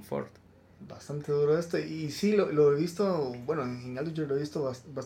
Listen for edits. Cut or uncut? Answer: uncut